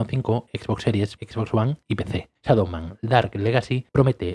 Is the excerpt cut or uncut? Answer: cut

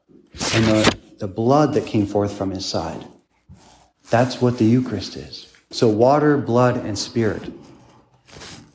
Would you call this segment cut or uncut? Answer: cut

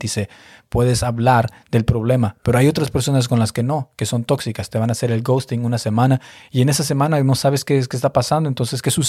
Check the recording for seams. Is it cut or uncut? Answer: uncut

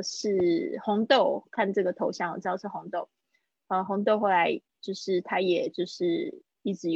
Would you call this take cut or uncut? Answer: uncut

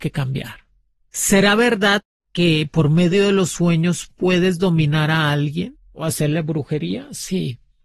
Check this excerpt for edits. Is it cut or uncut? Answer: uncut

